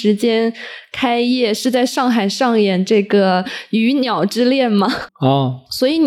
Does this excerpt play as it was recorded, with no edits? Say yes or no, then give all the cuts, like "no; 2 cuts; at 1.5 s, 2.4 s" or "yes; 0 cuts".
no; 1 cut; at 5.1 s